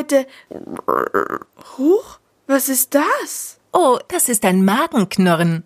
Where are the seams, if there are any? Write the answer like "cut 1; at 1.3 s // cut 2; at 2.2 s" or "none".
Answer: cut 1; at 4.1 s